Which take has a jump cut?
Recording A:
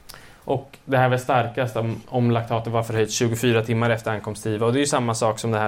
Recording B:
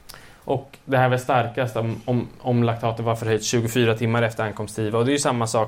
A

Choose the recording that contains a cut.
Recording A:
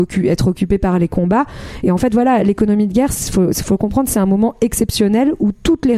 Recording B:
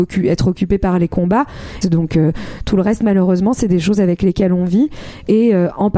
B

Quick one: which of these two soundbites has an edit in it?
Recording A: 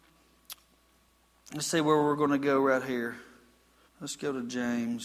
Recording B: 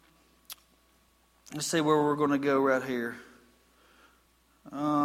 A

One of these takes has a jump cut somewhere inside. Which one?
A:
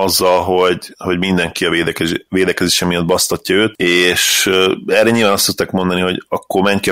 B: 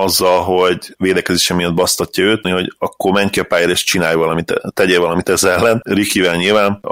B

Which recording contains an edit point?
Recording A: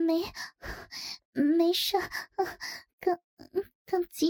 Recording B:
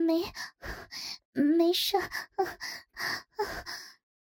B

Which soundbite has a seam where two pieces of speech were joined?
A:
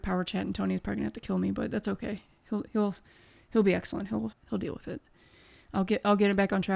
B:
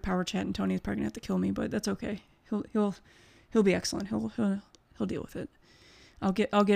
A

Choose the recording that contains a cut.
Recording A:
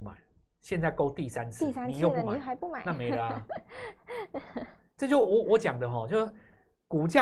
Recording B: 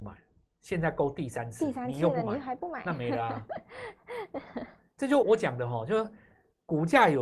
B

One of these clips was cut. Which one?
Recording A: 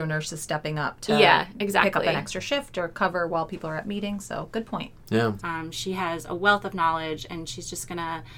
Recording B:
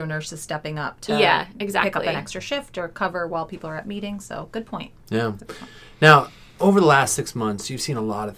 A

